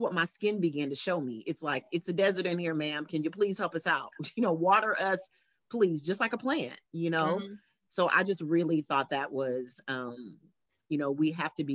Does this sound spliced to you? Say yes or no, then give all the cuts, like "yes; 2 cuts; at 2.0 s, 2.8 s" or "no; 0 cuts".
no; 0 cuts